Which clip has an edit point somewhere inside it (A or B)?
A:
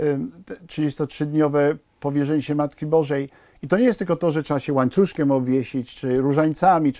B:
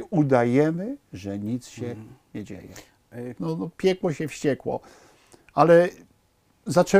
B